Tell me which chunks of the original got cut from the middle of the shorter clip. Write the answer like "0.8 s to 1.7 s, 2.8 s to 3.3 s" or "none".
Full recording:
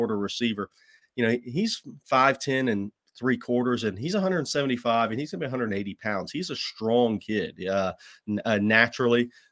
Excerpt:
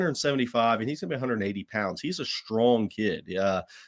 none